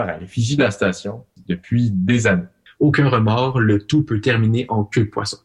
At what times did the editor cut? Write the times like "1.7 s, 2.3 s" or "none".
2.7 s